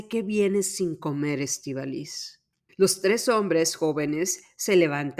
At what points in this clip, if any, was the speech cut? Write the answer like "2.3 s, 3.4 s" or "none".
2.7 s